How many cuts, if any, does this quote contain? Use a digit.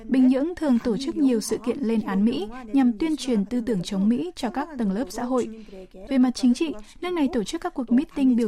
1